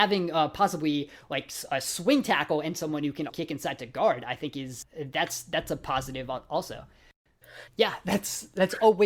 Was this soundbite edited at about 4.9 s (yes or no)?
no